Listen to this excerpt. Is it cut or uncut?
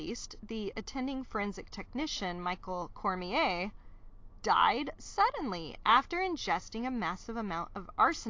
uncut